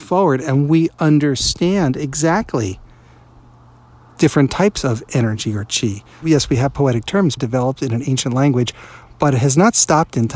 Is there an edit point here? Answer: yes; 2 cuts; at 6.2 s, 7.4 s

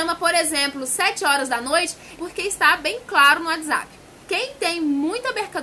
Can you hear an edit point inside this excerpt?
yes; 2 cuts; at 2.2 s, 4.2 s

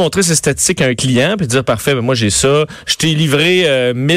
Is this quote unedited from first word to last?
yes; 0 cuts

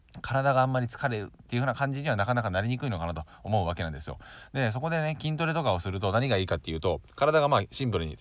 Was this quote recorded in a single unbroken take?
yes; 0 cuts

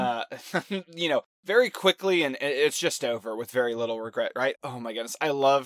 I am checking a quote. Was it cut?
yes; 1 cut; at 4.5 s

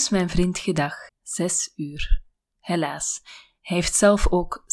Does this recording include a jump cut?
yes; 1 cut; at 1.1 s

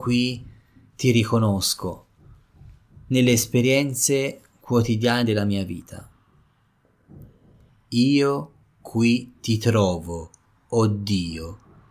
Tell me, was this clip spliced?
yes; 1 cut; at 7.7 s

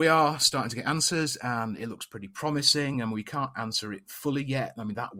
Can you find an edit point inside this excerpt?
no; 0 cuts

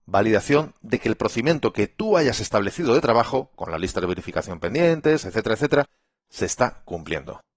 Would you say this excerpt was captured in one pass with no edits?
yes; 0 cuts

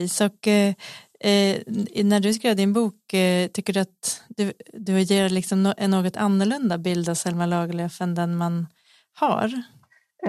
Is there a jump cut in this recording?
no; 0 cuts

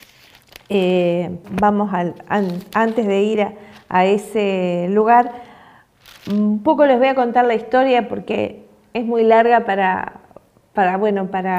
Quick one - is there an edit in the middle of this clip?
yes; 1 cut; at 1.4 s

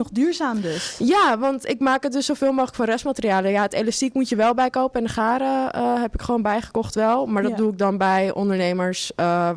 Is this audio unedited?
yes; 0 cuts

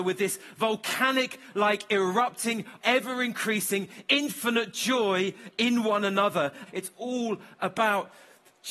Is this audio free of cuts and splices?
no; 2 cuts; at 2.8 s, 6.7 s

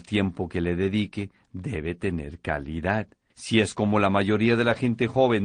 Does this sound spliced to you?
yes; 1 cut; at 3.3 s

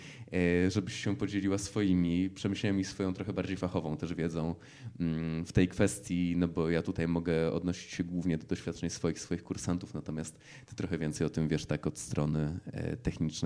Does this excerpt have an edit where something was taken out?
no; 0 cuts

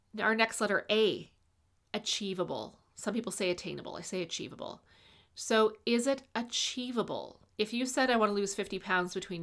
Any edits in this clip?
yes; 1 cut; at 7.5 s

